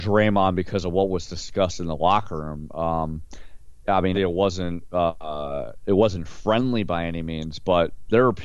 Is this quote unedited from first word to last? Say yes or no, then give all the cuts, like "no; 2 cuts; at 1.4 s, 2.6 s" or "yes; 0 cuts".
no; 1 cut; at 4.1 s